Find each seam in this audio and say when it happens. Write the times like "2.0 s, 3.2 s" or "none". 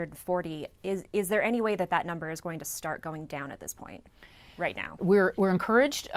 5.0 s